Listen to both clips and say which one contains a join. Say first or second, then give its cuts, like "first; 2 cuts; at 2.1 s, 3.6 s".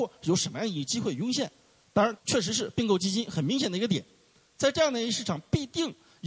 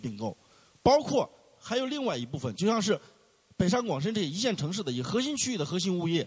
first; 1 cut; at 2.2 s